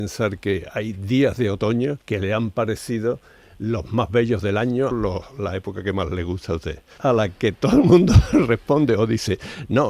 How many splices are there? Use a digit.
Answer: 3